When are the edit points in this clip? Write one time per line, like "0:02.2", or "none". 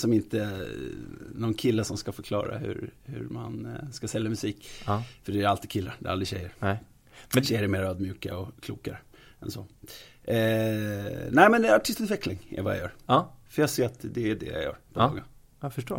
none